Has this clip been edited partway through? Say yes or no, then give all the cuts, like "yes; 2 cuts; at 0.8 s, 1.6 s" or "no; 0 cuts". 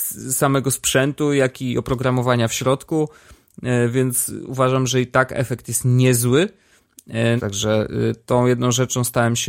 yes; 1 cut; at 7.4 s